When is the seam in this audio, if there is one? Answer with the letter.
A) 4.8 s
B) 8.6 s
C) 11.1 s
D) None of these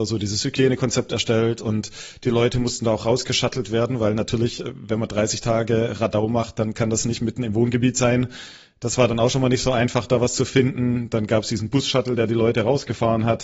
D